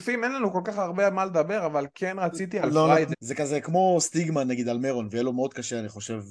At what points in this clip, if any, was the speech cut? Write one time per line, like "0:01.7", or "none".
0:03.1